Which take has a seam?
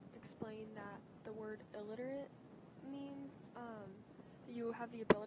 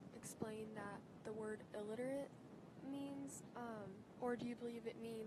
second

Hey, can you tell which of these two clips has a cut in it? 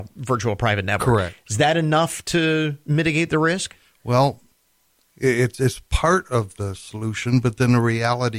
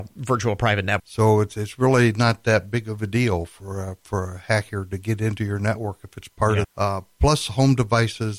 second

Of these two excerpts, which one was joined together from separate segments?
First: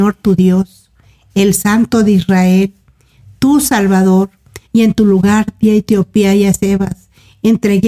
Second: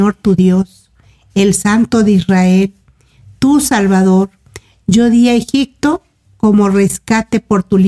first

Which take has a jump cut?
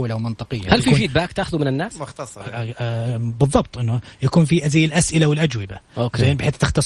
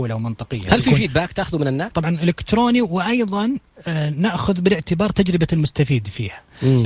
second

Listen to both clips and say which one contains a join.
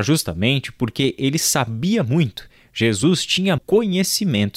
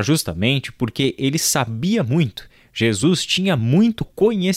first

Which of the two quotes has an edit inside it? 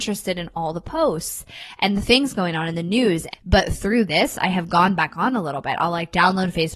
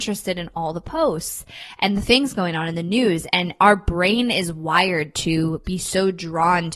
first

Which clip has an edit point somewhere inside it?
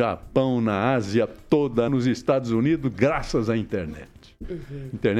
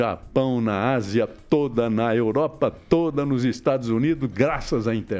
first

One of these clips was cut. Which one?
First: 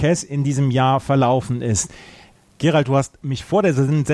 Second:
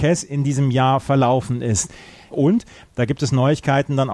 second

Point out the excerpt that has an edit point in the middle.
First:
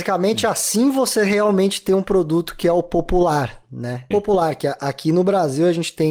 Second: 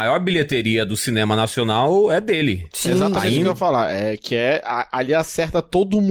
first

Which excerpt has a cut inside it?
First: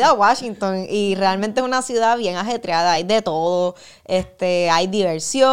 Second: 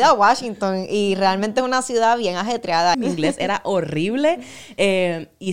second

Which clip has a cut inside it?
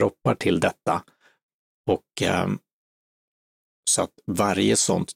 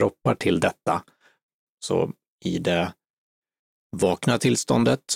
second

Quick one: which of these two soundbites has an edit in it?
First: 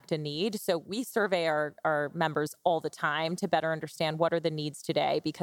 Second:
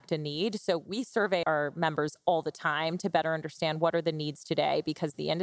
second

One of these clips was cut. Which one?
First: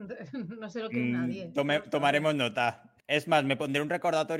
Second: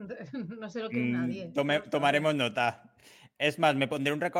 first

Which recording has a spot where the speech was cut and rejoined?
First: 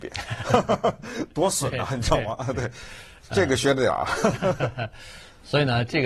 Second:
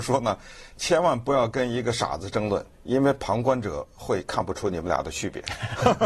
second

